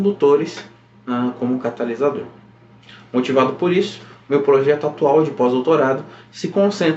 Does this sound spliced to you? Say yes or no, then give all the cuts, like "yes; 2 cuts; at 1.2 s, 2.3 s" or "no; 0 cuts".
no; 0 cuts